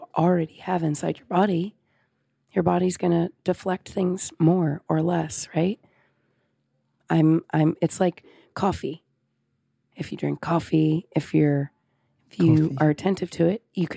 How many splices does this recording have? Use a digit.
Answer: 0